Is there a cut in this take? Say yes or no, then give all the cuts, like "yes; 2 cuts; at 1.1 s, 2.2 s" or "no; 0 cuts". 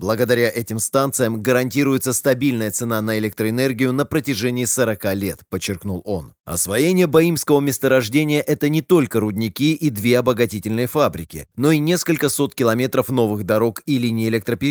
yes; 1 cut; at 6.4 s